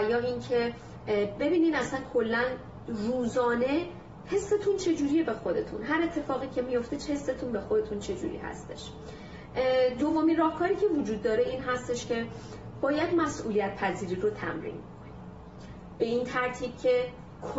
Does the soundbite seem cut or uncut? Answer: cut